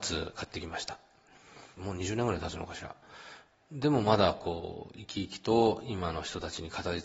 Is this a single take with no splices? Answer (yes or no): no